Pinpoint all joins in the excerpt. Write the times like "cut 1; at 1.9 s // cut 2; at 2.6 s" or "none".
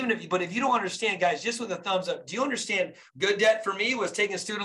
cut 1; at 3.1 s